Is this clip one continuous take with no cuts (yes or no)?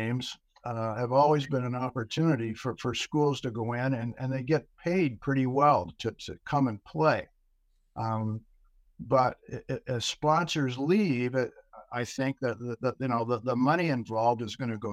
yes